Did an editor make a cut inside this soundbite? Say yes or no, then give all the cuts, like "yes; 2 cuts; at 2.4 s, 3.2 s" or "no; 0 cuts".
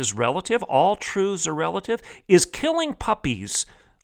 no; 0 cuts